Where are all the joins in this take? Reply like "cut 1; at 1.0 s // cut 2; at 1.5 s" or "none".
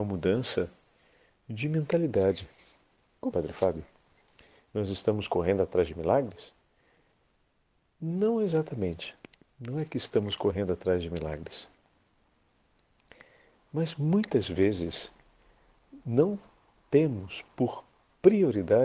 cut 1; at 3.3 s